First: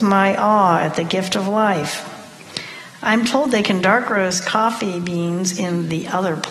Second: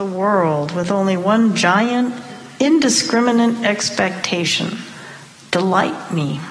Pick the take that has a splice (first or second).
first